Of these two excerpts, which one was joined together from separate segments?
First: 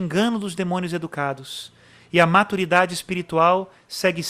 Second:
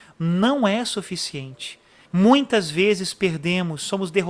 second; 1 cut; at 2.1 s

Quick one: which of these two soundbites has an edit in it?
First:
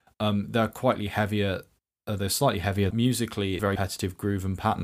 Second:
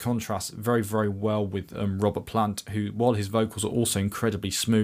first; 1 cut; at 2.9 s

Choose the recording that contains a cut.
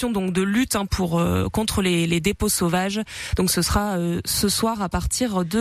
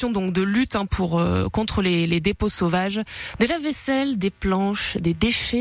second; 1 cut; at 3.3 s

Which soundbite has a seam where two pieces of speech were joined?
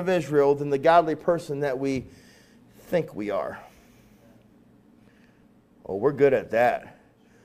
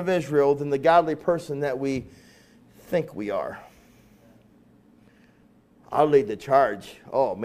second; 1 cut; at 5.8 s

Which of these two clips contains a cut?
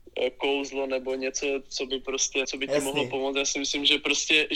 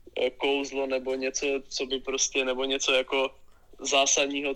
first; 1 cut; at 2.4 s

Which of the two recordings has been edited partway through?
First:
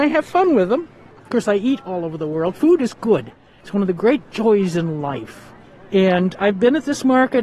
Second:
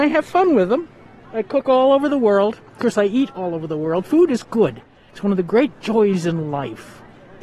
first; 1 cut; at 1.1 s

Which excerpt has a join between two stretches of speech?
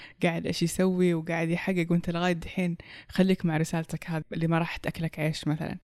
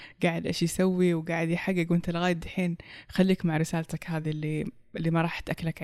first; 1 cut; at 4.2 s

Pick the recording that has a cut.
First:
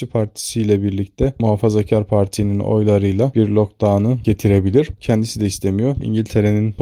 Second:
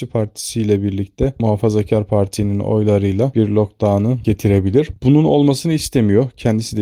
first; 1 cut; at 5.0 s

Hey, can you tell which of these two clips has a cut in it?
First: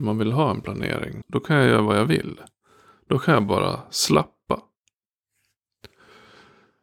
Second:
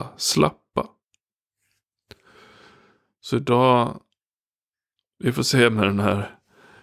first; 1 cut; at 1.2 s

